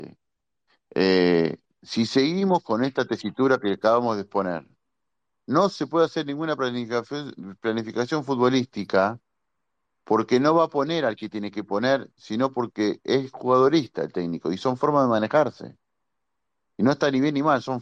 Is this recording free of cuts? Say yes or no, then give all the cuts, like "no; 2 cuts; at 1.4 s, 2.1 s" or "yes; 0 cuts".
yes; 0 cuts